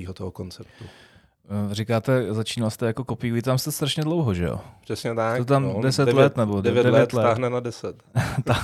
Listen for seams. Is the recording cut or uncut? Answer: uncut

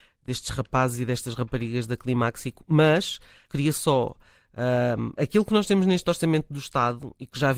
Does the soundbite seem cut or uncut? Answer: cut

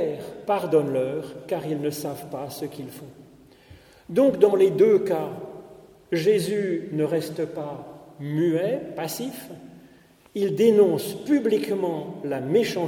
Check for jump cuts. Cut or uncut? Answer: uncut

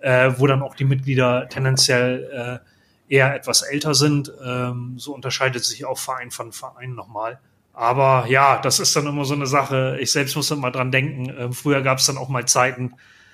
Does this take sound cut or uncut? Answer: uncut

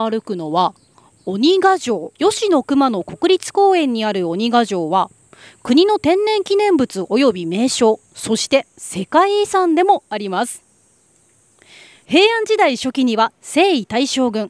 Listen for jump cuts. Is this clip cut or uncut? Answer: cut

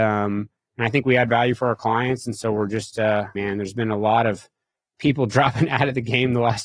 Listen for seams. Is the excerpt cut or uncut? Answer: cut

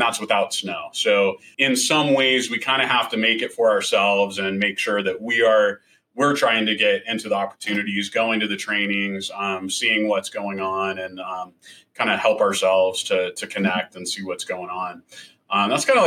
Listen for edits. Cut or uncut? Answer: cut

